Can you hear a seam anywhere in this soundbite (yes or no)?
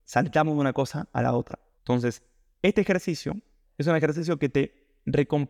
yes